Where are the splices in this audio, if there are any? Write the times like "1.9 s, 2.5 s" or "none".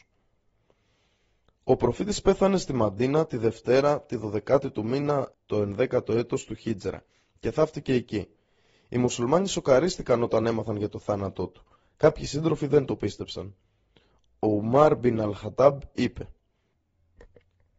5.3 s

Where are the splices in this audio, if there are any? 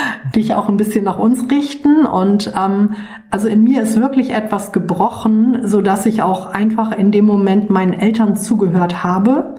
none

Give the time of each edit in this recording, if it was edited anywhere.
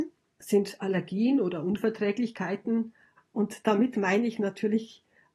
3.2 s

